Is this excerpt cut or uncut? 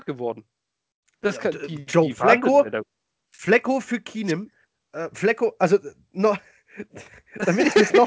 uncut